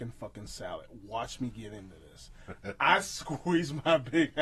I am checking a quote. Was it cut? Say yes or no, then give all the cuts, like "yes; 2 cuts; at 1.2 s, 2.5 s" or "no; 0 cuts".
no; 0 cuts